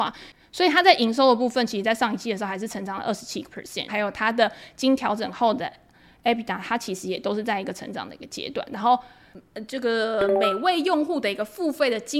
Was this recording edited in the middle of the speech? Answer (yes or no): yes